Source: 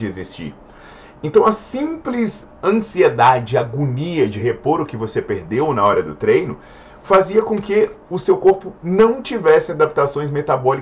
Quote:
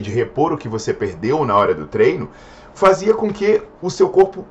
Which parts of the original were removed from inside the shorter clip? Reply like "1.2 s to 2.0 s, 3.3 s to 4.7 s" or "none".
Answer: none